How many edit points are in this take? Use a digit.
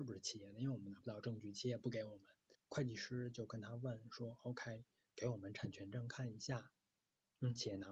1